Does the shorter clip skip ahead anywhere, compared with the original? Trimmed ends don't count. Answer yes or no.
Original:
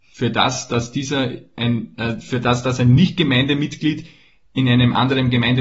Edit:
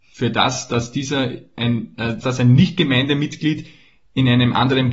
yes